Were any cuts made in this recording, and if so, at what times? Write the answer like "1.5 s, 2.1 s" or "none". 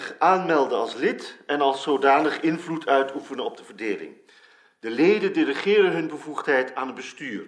none